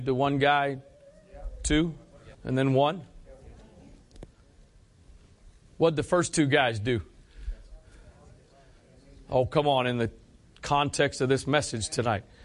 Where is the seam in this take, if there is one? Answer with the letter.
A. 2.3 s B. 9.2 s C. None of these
A